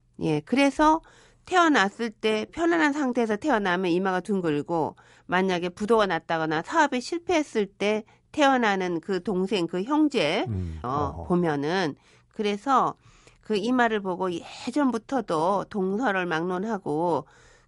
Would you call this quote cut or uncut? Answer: cut